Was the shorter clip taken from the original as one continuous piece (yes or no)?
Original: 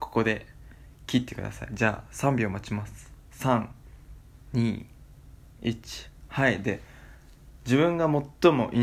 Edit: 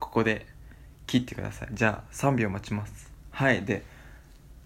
no